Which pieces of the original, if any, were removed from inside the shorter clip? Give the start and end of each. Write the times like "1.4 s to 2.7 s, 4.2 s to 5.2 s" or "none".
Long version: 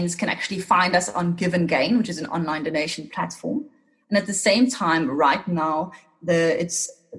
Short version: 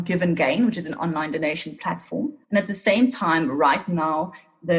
3.7 s to 4.0 s